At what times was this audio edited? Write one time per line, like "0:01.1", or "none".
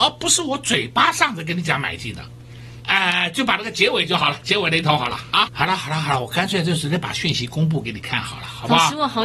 0:02.8
0:05.5